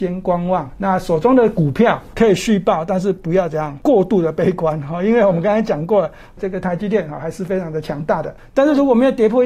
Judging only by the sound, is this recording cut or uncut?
cut